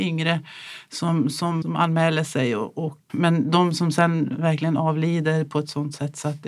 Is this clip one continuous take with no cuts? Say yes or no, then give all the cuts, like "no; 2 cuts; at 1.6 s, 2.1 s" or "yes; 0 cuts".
no; 2 cuts; at 1.6 s, 3.1 s